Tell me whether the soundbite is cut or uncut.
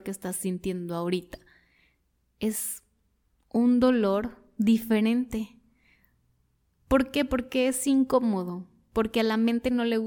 uncut